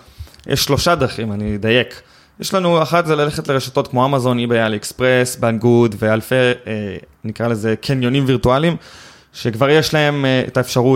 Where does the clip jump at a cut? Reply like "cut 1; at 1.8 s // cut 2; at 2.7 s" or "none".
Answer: none